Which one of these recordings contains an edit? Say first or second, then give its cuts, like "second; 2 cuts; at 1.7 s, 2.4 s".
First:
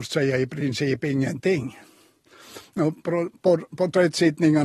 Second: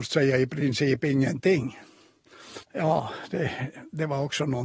second; 1 cut; at 2.6 s